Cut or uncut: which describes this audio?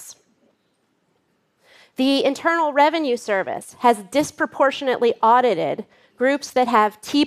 uncut